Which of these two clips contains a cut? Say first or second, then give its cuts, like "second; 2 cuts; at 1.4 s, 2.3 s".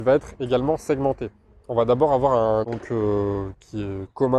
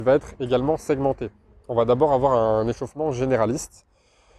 first; 1 cut; at 2.6 s